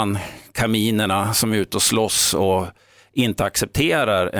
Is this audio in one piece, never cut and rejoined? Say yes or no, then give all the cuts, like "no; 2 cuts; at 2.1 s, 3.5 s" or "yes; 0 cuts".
yes; 0 cuts